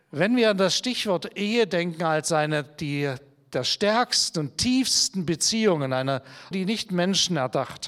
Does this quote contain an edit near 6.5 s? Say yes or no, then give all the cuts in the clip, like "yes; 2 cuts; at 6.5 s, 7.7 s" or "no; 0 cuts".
yes; 1 cut; at 6.5 s